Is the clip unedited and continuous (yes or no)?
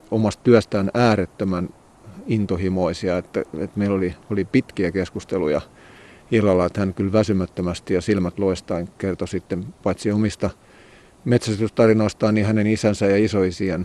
yes